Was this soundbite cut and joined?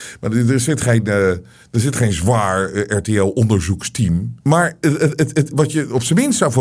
yes; 2 cuts; at 4.4 s, 5.5 s

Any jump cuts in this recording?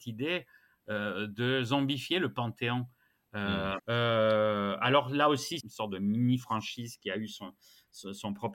yes; 2 cuts; at 3.8 s, 5.6 s

